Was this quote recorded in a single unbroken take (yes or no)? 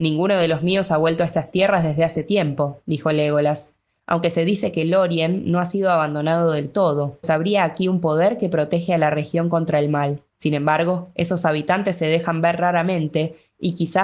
no